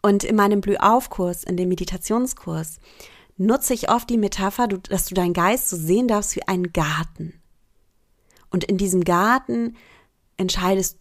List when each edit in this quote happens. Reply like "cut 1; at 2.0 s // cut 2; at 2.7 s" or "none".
none